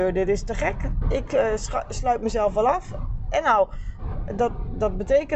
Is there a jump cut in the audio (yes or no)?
yes